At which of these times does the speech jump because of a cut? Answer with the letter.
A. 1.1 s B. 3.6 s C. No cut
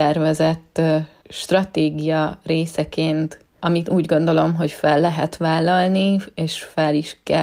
B